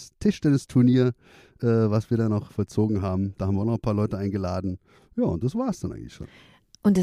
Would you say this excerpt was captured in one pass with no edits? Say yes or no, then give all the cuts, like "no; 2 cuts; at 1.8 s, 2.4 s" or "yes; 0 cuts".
no; 1 cut; at 2.5 s